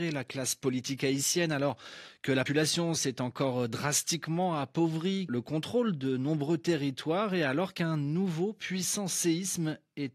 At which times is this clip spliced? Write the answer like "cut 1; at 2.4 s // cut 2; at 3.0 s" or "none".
cut 1; at 2.5 s // cut 2; at 5.3 s